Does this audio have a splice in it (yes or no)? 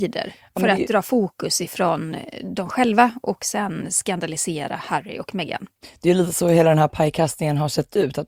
no